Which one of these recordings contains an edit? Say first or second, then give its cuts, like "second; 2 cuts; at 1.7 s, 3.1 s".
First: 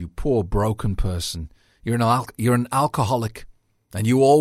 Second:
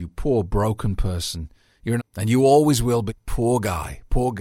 second; 2 cuts; at 2.0 s, 3.1 s